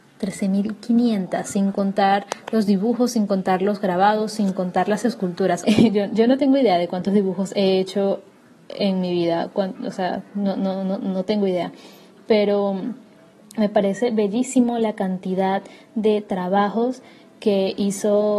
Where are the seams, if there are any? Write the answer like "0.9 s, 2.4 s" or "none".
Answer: 5.6 s